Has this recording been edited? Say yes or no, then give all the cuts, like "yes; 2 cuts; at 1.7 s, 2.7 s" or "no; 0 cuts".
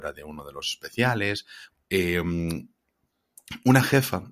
yes; 1 cut; at 1.7 s